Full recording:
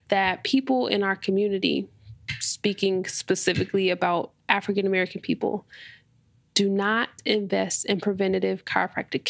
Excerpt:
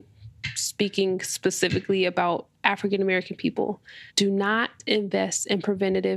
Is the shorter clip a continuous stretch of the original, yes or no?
no